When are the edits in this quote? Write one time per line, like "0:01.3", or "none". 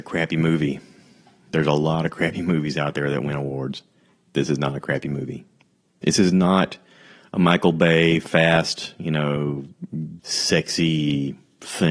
0:10.2